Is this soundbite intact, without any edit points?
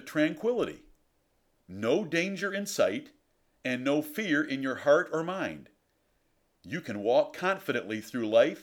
yes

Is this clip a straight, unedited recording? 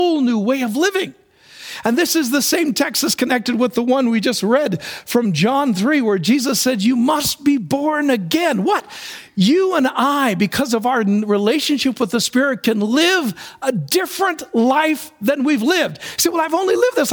yes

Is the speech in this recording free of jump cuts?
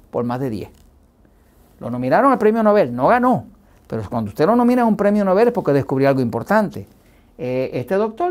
yes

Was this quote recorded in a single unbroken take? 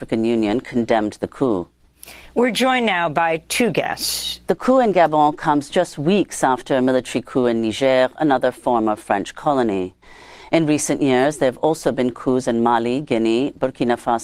no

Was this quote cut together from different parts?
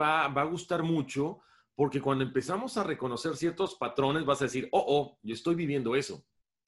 no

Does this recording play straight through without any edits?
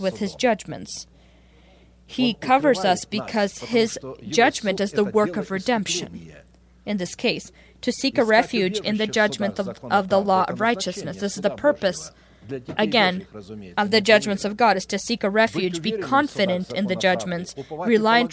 yes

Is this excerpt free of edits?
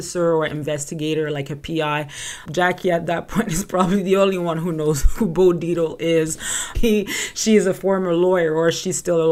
no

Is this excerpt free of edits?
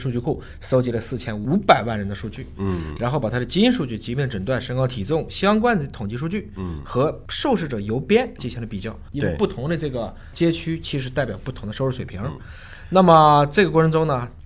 no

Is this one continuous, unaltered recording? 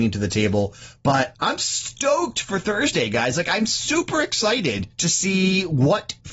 yes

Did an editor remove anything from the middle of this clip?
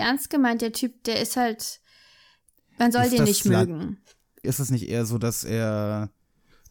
yes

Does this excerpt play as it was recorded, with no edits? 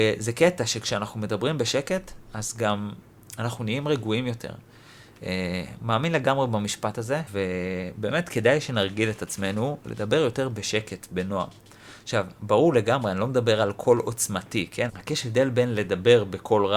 no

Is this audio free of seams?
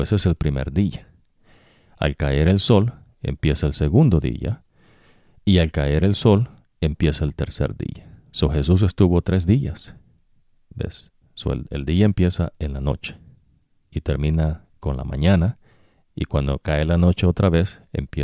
no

